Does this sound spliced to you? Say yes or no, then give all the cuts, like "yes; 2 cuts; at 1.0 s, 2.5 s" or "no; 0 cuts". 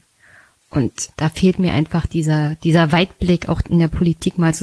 yes; 1 cut; at 1.1 s